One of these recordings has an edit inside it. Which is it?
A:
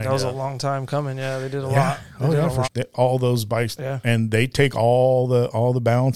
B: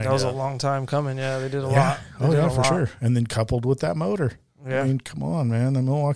A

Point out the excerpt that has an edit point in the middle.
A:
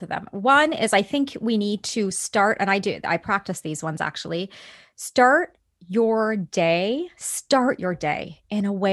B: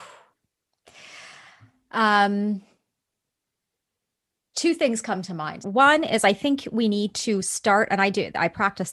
B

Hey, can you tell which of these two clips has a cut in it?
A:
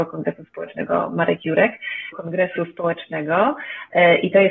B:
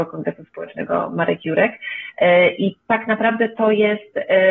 A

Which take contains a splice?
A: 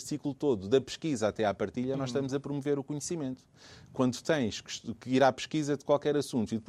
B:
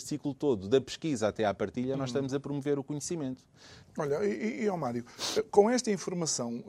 B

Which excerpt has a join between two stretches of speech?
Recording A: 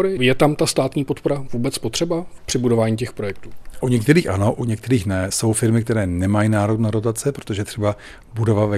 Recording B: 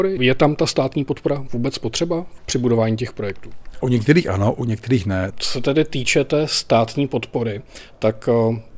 B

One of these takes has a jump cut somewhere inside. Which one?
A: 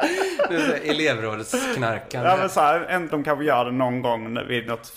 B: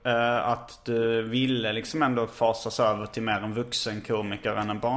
A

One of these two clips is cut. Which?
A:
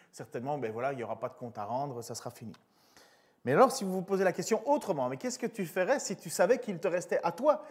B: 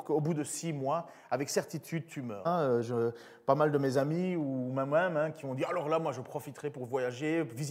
B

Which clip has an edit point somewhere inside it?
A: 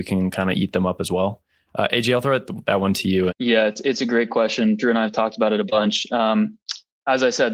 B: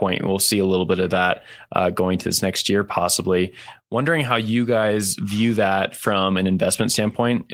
A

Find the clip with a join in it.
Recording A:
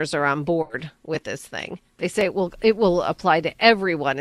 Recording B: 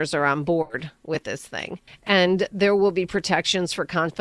B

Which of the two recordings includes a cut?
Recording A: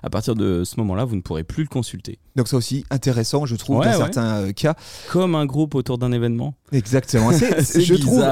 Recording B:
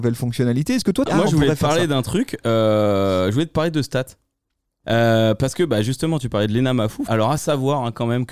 B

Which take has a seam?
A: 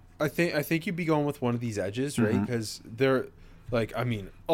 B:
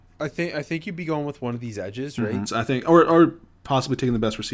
B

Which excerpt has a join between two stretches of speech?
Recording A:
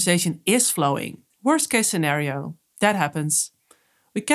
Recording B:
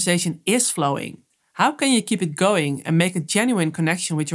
A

